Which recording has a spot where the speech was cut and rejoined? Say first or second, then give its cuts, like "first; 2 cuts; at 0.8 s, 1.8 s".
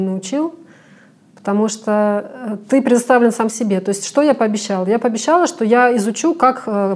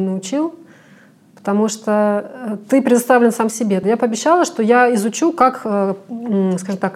second; 1 cut; at 3.8 s